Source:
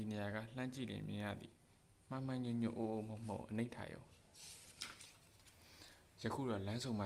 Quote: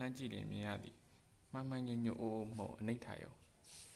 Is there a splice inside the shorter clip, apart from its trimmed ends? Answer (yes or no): yes